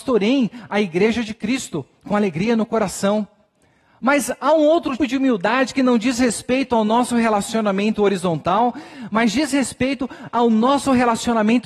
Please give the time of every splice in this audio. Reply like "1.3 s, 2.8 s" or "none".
5.0 s